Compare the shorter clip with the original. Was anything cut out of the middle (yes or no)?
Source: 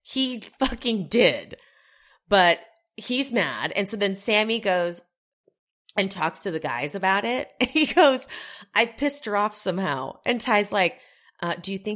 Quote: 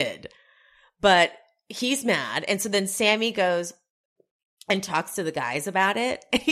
no